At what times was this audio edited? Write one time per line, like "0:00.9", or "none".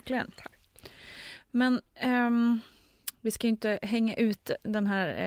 none